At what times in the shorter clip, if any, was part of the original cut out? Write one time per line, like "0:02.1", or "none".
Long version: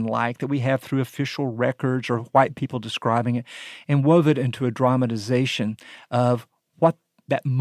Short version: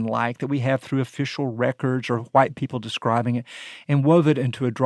none